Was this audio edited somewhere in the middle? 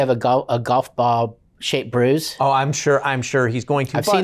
no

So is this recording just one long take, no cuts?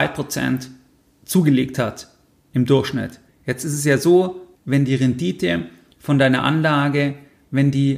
no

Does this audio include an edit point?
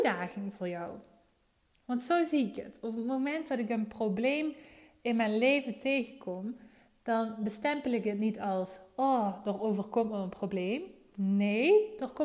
no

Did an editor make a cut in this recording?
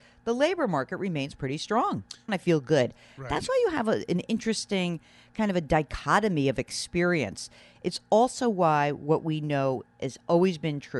yes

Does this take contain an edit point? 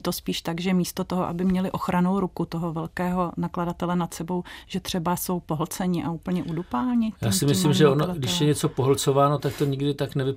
no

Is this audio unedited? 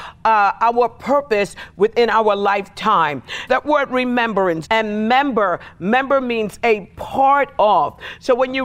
no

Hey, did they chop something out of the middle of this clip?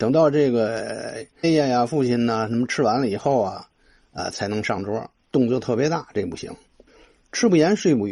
yes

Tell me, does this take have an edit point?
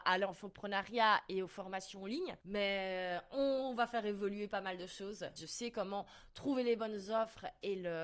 yes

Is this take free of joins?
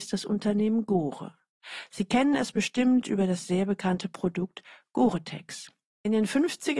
yes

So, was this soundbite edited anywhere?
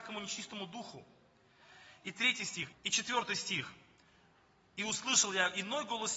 yes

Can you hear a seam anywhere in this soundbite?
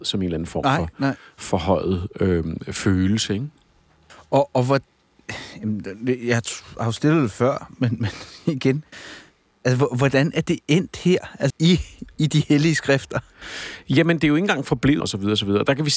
yes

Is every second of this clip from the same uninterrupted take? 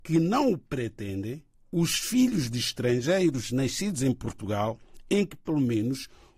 yes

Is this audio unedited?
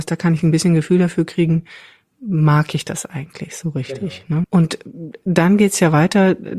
no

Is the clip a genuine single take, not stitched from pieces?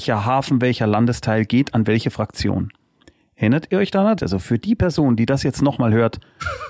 no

